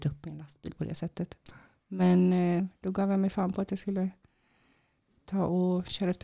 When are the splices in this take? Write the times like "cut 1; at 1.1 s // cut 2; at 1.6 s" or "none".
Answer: none